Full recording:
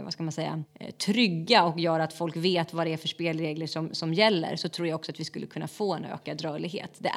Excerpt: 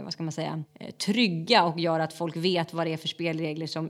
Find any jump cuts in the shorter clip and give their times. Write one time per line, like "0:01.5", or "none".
none